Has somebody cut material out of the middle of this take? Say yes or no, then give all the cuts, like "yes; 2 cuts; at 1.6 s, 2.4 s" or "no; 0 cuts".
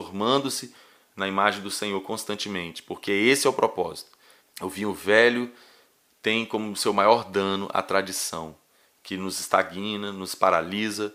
yes; 1 cut; at 4.4 s